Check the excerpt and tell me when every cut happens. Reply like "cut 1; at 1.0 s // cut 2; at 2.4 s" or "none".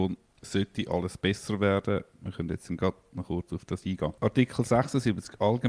cut 1; at 4.2 s